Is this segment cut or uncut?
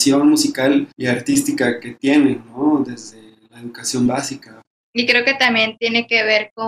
uncut